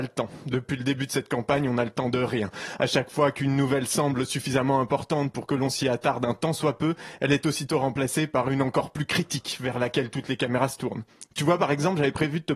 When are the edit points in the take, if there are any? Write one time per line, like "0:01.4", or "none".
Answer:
none